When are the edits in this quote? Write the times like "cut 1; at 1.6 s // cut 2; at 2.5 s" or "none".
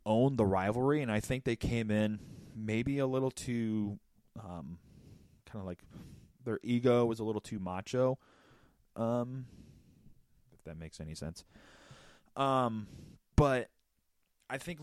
none